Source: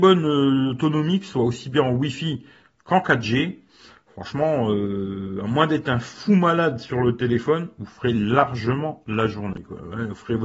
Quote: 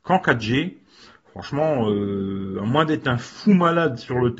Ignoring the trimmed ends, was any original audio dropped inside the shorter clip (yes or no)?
no